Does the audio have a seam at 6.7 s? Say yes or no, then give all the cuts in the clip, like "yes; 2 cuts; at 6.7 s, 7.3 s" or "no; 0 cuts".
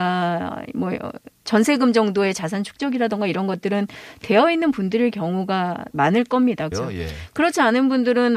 yes; 1 cut; at 6.7 s